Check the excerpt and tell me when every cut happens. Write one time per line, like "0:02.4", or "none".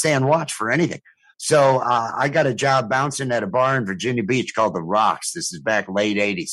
none